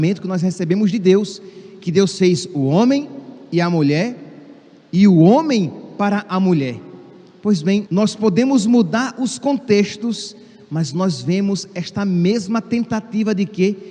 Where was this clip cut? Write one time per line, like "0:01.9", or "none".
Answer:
0:07.9